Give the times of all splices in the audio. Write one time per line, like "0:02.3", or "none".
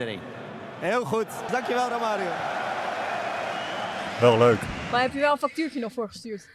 0:01.5